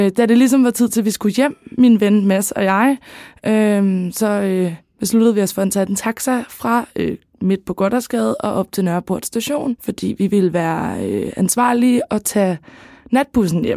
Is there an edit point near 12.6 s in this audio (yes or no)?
no